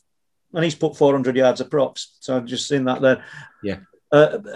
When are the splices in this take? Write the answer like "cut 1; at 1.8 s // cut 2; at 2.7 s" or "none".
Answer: cut 1; at 3.5 s